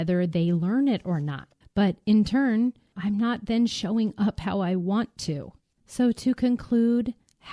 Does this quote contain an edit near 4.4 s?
no; 3 cuts; at 1.6 s, 2.9 s, 5.8 s

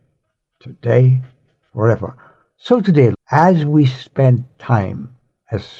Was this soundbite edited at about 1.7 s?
no; 1 cut; at 3.1 s

